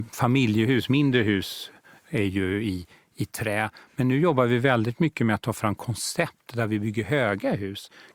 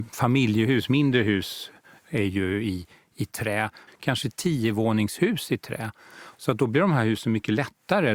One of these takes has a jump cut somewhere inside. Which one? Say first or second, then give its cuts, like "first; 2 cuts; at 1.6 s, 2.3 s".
second; 2 cuts; at 3.9 s, 6.3 s